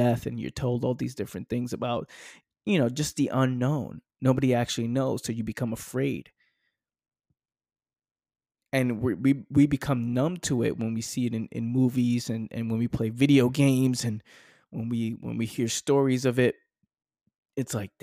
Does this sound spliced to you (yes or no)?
no